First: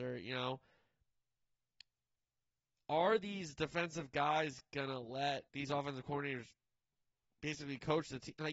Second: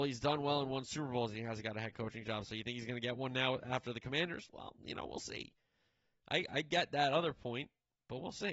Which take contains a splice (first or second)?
first